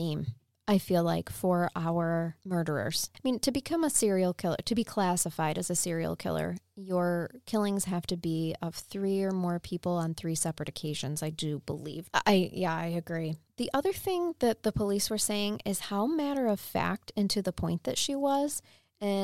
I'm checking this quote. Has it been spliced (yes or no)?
yes